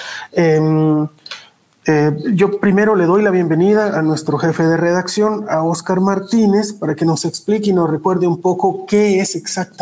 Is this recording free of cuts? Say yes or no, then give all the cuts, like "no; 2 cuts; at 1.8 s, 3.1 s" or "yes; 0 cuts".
yes; 0 cuts